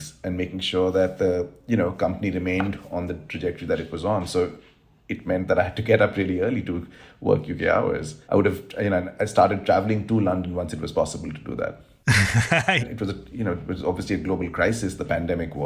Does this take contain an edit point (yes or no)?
yes